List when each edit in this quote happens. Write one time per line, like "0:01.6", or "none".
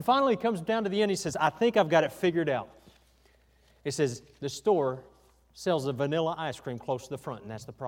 none